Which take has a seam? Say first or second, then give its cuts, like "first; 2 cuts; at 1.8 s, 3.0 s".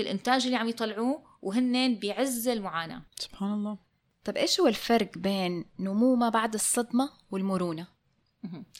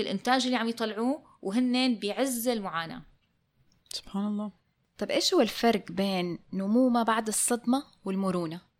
first; 1 cut; at 3.1 s